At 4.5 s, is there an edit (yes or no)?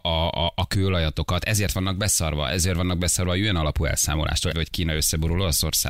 yes